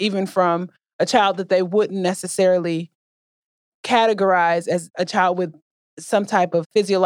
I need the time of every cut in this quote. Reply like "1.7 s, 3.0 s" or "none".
none